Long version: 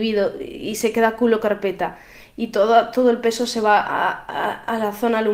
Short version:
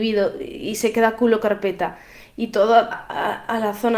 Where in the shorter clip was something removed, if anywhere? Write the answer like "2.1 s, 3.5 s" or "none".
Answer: 2.9 s